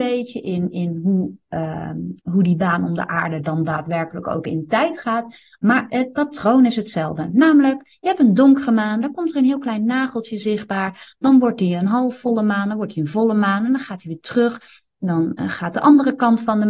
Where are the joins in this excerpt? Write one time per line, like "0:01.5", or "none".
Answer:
none